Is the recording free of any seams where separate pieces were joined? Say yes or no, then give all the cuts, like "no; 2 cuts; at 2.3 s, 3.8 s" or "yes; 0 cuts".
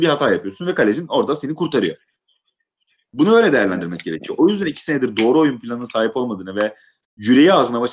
yes; 0 cuts